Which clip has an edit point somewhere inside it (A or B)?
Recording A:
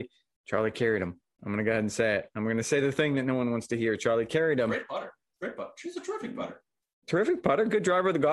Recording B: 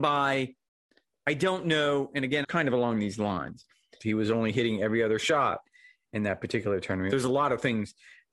B